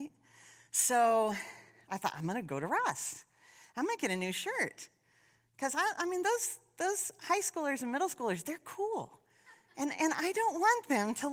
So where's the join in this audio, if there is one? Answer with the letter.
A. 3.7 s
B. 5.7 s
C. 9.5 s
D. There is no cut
D